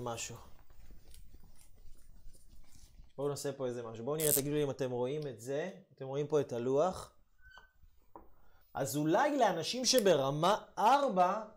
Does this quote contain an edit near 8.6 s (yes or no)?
yes